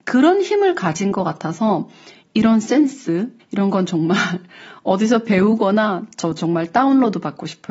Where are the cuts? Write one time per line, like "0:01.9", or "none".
0:03.4